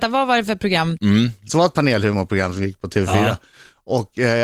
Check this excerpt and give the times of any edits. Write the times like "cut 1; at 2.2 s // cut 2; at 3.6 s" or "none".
cut 1; at 1.0 s